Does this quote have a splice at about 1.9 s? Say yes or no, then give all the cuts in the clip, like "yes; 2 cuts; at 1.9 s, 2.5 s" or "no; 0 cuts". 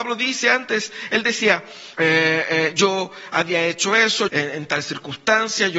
yes; 2 cuts; at 1.9 s, 4.3 s